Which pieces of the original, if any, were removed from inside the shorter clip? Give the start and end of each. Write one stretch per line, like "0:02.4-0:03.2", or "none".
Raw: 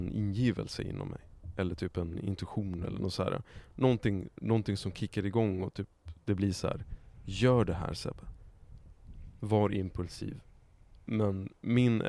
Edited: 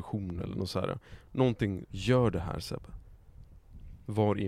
0:04.3-0:07.2